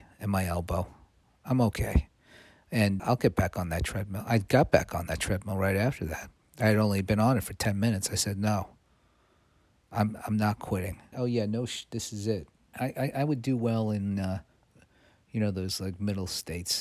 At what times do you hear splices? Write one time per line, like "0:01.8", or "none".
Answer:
0:03.0
0:11.1
0:12.7